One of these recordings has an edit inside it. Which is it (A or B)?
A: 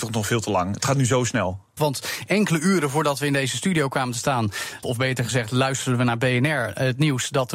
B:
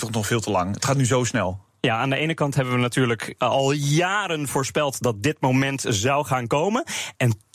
A